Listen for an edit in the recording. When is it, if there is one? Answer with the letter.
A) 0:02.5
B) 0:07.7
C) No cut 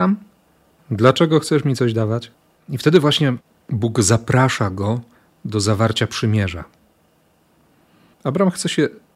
A